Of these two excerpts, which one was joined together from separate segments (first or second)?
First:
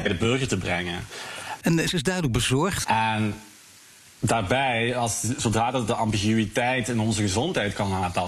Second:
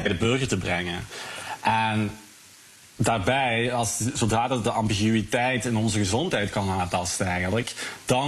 first